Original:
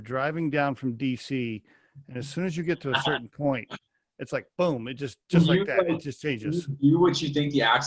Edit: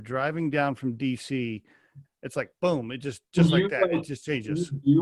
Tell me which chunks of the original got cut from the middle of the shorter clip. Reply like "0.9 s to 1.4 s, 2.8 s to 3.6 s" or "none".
2.1 s to 4.0 s